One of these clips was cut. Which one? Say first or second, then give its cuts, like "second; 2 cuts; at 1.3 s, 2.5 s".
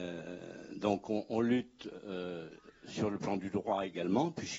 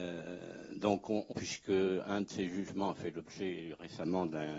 second; 1 cut; at 1.3 s